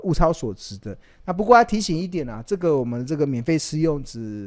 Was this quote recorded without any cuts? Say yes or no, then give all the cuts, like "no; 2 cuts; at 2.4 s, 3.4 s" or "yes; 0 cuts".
yes; 0 cuts